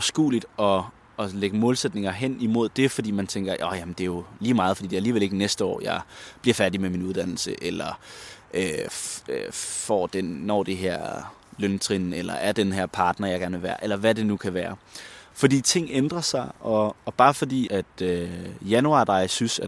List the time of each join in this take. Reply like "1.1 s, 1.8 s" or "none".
15.3 s, 17.7 s